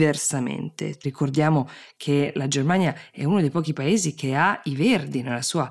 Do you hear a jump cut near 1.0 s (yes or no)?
yes